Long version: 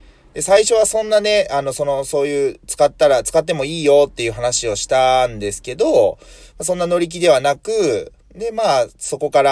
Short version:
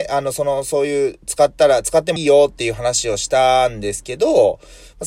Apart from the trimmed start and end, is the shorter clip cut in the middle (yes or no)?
yes